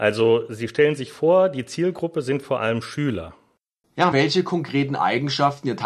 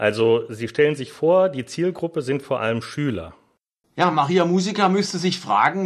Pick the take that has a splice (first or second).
first